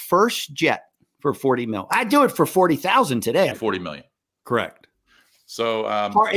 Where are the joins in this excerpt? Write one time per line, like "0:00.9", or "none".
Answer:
0:03.5